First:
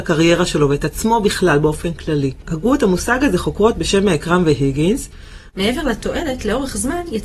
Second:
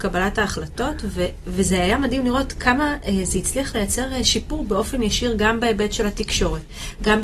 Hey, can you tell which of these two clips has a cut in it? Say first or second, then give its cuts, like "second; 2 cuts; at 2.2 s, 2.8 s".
first; 1 cut; at 5.5 s